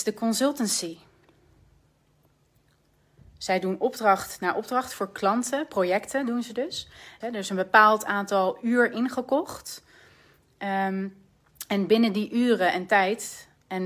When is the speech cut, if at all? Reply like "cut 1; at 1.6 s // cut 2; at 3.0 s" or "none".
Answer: cut 1; at 7.2 s